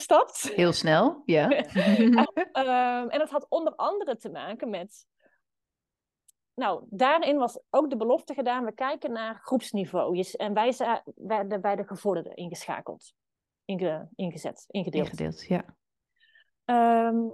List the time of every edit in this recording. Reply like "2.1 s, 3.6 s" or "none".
2.2 s